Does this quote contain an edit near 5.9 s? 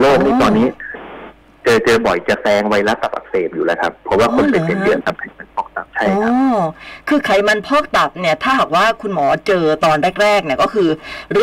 yes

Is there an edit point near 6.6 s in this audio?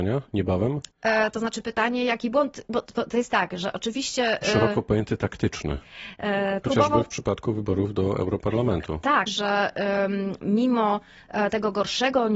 yes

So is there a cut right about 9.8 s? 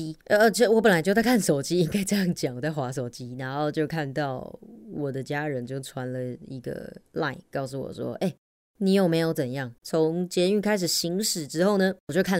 yes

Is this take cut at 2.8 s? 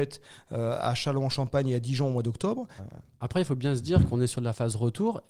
yes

